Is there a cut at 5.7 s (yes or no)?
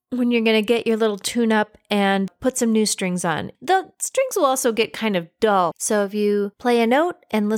yes